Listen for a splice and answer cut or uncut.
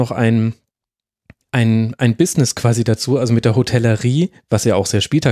uncut